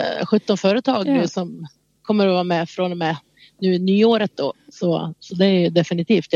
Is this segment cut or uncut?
cut